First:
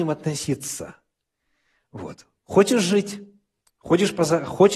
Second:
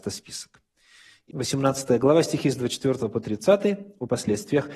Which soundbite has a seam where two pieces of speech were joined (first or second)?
second